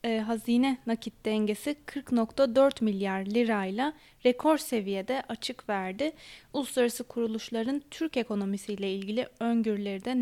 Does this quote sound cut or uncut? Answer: uncut